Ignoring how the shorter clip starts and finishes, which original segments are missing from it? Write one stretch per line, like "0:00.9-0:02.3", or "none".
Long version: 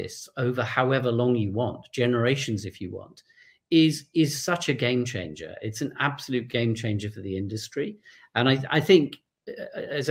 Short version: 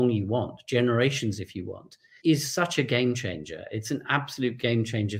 0:03.5-0:04.1